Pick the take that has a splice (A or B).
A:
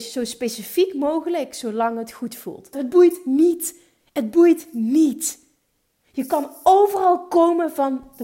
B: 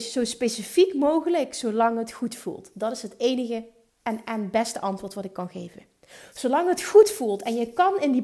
A